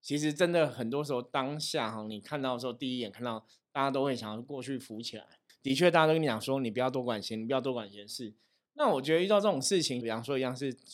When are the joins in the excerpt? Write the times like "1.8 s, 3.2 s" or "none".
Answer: 5.5 s, 8.7 s, 10.0 s